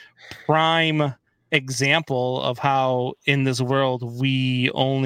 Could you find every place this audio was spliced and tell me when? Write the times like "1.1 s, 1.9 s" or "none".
none